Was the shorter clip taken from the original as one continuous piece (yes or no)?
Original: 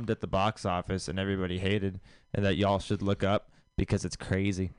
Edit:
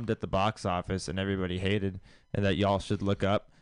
yes